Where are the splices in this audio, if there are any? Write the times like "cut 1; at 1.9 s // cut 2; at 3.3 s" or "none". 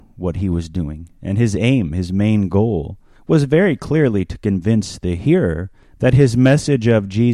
none